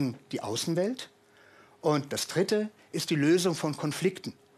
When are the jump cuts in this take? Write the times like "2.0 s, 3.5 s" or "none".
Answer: none